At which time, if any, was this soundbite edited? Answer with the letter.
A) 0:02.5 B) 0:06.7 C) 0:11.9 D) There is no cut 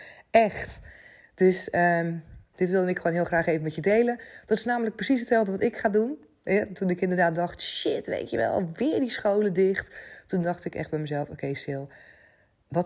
A